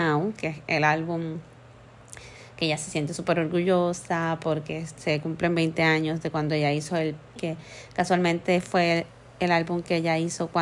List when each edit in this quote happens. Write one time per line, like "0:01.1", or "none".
0:07.4